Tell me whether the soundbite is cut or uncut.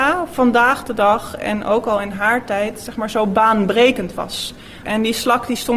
cut